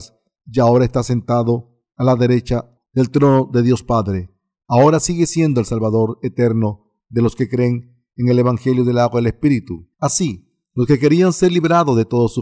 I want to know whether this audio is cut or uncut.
cut